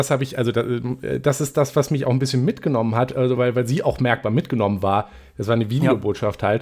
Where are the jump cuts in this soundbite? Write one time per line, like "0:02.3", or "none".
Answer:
none